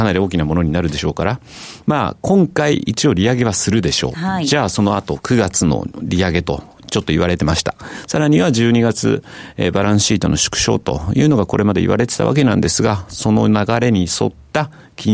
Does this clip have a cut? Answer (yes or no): no